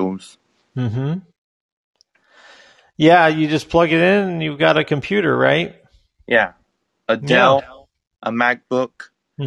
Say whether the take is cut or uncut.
uncut